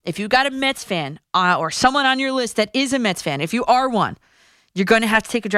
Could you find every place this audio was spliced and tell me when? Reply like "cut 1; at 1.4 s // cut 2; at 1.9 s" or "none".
none

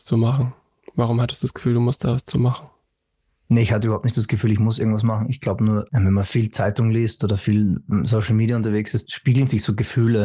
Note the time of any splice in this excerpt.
none

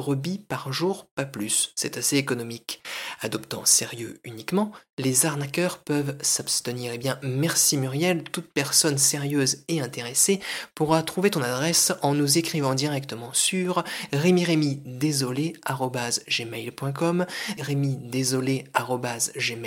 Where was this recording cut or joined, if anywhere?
cut 1; at 17.6 s

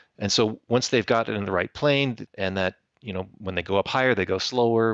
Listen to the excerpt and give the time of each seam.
cut 1; at 2.3 s

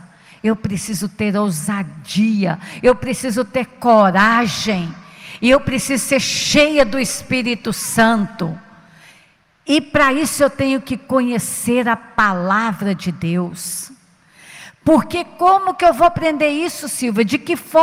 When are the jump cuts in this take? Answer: none

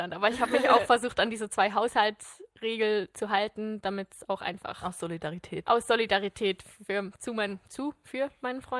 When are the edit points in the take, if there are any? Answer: none

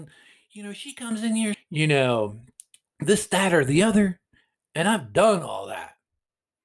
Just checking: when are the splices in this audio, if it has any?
cut 1; at 1.5 s

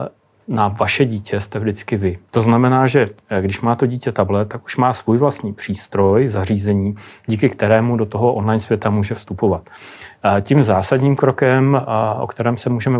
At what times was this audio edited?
cut 1; at 2.3 s

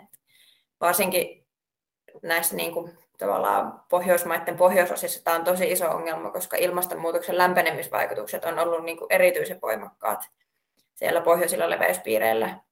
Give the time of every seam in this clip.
none

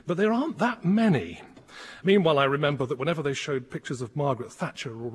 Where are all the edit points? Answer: cut 1; at 2.0 s

